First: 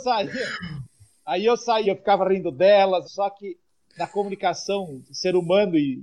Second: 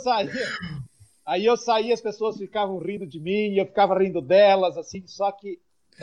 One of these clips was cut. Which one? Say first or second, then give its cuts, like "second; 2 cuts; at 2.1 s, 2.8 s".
first; 2 cuts; at 1.8 s, 3.0 s